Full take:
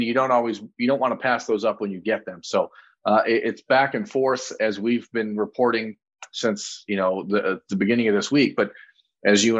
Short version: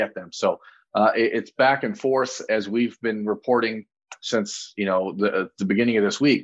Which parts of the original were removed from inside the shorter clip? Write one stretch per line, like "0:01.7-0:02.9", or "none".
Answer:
none